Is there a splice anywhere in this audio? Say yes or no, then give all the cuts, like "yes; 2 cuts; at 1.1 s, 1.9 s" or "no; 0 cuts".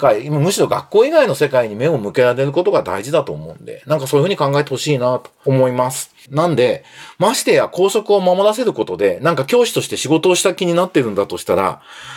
yes; 1 cut; at 6.3 s